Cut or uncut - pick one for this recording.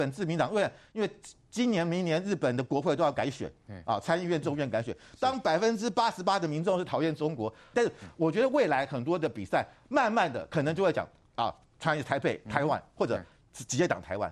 cut